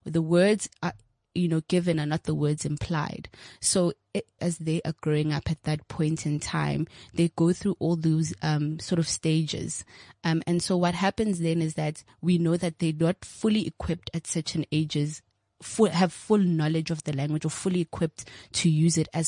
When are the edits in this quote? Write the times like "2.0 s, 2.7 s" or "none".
4.4 s